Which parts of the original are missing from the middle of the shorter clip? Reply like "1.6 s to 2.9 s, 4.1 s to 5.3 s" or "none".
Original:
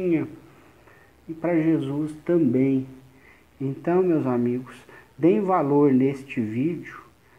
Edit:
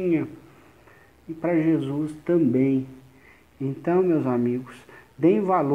none